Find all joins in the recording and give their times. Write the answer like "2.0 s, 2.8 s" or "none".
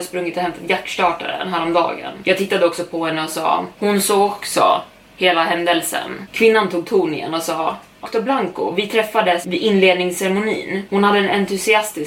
8.0 s